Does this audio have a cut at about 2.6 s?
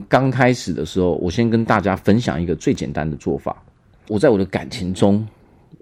no; 1 cut; at 4.0 s

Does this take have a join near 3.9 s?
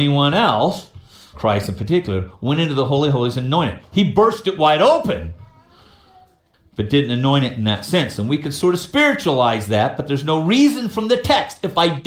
no; 1 cut; at 1.3 s

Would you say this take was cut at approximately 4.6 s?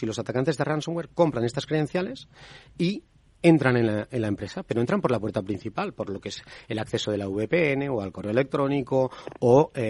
no; 0 cuts

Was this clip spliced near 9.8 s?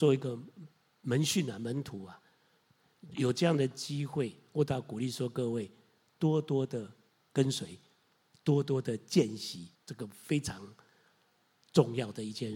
yes; 1 cut; at 9.8 s

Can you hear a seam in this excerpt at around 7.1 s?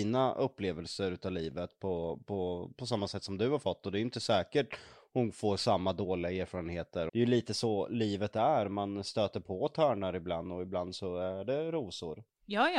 yes; 1 cut; at 7.1 s

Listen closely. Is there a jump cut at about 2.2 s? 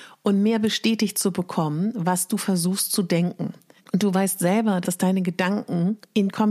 no; 2 cuts; at 3.8 s, 4.8 s

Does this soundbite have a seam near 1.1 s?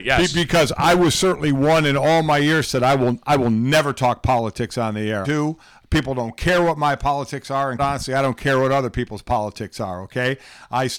no; 2 cuts; at 5.2 s, 7.8 s

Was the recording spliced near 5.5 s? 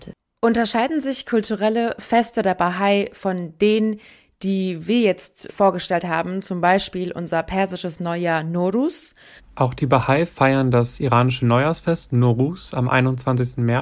yes; 2 cuts; at 5.5 s, 9.4 s

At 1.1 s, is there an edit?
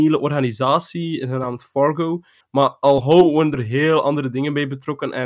no; 1 cut; at 2.4 s

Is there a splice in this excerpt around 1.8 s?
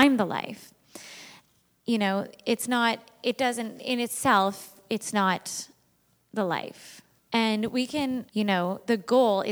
no; 2 cuts; at 7.2 s, 8.3 s

